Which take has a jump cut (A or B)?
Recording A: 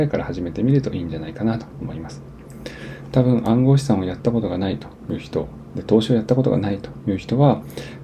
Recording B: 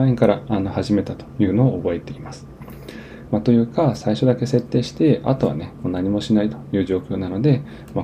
B